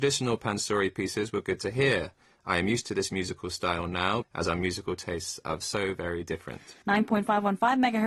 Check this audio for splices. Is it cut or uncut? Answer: cut